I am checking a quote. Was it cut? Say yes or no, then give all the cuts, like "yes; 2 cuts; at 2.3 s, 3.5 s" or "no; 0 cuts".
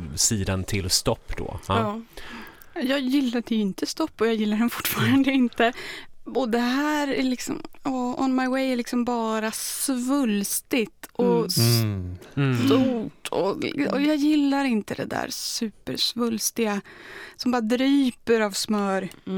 no; 0 cuts